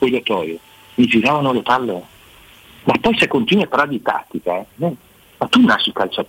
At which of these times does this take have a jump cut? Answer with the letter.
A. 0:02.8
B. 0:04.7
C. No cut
A